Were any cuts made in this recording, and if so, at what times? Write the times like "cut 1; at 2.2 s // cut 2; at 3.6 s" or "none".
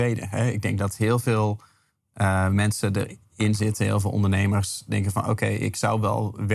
none